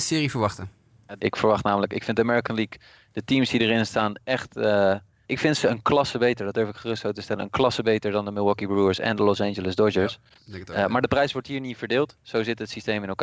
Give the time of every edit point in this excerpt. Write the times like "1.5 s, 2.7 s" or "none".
1.2 s, 5.2 s